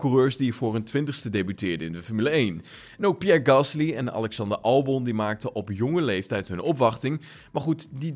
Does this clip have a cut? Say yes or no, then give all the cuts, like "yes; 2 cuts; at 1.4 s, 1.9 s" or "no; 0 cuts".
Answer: no; 0 cuts